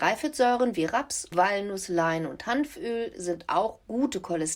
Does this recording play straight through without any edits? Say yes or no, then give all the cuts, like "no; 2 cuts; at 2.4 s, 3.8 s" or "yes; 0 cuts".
no; 1 cut; at 1.3 s